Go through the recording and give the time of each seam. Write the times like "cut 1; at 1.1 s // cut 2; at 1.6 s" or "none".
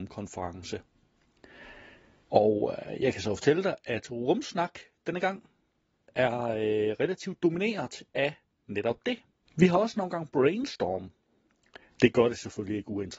cut 1; at 2.2 s // cut 2; at 9.4 s // cut 3; at 11.9 s